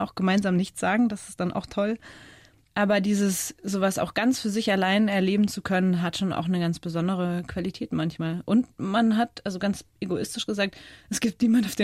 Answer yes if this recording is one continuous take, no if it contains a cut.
yes